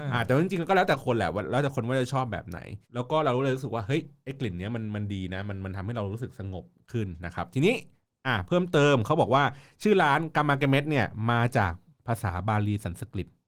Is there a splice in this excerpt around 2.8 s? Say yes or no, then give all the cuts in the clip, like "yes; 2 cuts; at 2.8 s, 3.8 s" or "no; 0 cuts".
yes; 1 cut; at 2.8 s